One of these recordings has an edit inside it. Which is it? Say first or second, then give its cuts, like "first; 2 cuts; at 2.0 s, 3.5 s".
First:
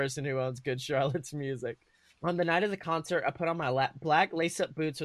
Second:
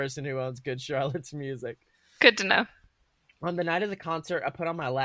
first; 1 cut; at 2.1 s